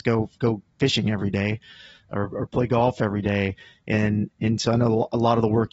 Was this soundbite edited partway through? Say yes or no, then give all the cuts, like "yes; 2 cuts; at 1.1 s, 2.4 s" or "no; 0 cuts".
no; 0 cuts